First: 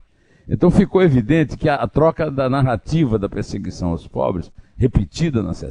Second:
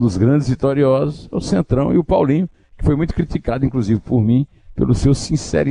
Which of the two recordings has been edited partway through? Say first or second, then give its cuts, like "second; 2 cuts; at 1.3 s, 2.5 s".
first; 1 cut; at 1.8 s